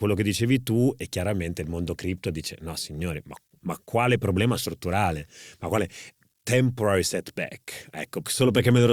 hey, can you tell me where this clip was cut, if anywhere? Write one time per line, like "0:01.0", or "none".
none